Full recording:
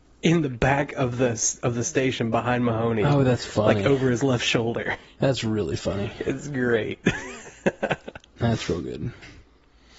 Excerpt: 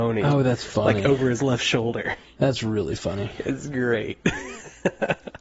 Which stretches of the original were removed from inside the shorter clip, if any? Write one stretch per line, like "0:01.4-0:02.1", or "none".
none